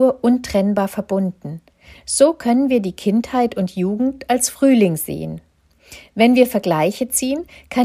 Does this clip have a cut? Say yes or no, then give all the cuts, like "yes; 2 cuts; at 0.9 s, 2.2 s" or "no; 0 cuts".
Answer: no; 0 cuts